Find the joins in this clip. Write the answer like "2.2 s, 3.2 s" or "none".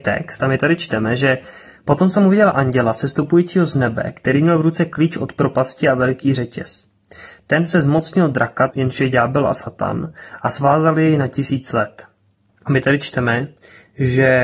8.7 s, 12.5 s